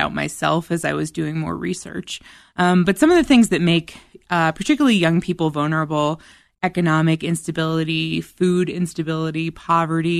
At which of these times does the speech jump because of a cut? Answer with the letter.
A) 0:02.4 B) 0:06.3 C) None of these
C